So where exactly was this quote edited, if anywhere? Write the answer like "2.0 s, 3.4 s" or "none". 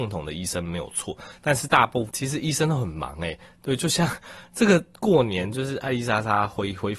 2.1 s